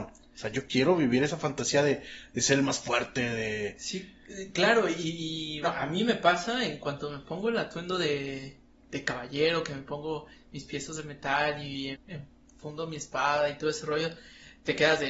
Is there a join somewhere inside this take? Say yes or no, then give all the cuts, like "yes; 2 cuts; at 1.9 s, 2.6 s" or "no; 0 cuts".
yes; 2 cuts; at 5.6 s, 11.9 s